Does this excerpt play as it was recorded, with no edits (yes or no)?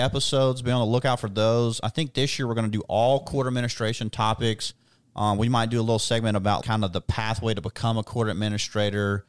no